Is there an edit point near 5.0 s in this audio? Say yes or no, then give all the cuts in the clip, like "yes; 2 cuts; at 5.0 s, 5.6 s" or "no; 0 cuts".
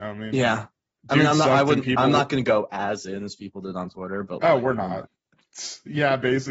yes; 1 cut; at 5.0 s